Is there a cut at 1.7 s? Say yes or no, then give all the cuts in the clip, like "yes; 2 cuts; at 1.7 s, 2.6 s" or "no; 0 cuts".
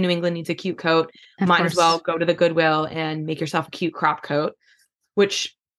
no; 0 cuts